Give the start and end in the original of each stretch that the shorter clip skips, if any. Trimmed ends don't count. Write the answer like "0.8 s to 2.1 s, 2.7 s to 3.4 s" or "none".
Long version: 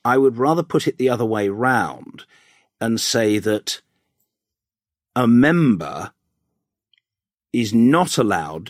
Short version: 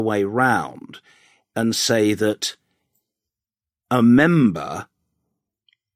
none